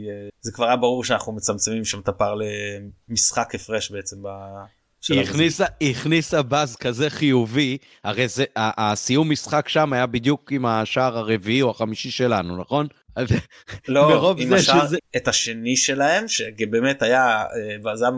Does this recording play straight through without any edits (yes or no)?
no